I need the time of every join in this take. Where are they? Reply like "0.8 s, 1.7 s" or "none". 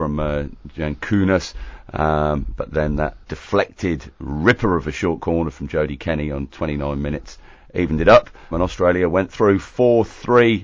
3.2 s, 8.5 s